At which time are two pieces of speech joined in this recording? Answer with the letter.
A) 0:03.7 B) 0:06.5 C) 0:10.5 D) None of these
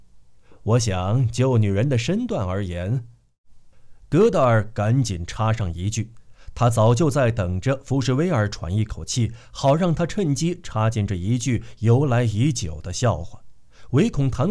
A